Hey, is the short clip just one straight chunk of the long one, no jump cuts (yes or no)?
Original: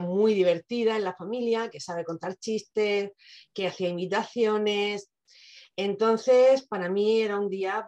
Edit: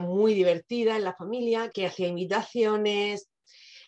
no